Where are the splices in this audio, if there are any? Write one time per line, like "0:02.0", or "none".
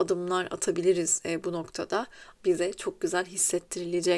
0:02.3